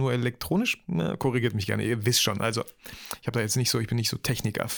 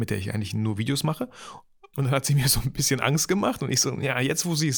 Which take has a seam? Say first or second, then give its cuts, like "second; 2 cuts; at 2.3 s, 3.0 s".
second; 1 cut; at 1.9 s